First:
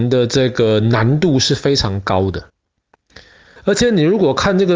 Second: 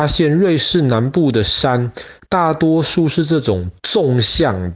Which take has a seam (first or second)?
first